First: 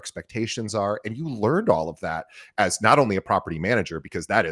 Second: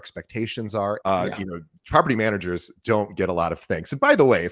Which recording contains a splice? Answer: second; 1 cut; at 1.0 s

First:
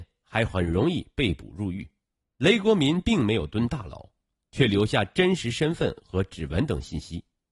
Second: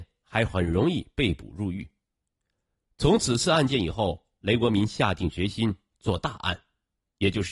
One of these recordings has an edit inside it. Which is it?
first; 1 cut; at 2.2 s

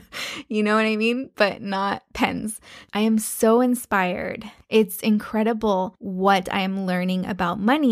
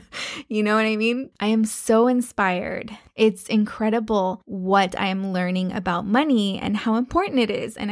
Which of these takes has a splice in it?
second; 1 cut; at 1.3 s

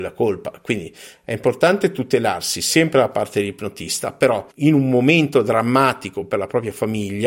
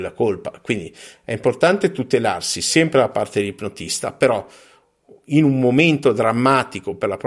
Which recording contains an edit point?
first; 1 cut; at 4.5 s

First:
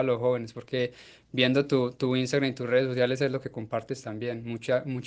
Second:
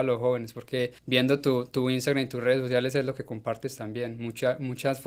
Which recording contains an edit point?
second; 1 cut; at 1.0 s

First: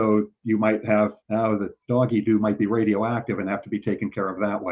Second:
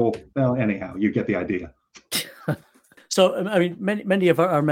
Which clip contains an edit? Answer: first; 1 cut; at 1.2 s

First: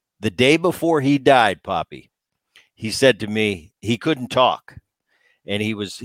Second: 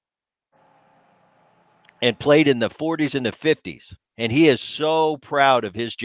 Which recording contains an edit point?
second; 1 cut; at 4.1 s

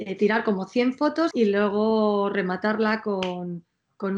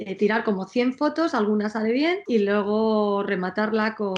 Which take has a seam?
first; 1 cut; at 1.3 s

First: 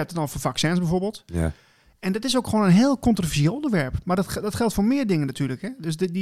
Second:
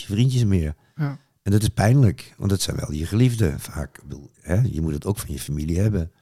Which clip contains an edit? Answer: second; 1 cut; at 4.3 s

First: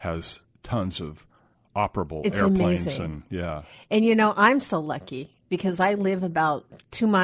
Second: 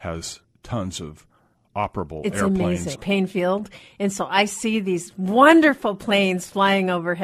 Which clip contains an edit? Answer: second; 1 cut; at 2.9 s

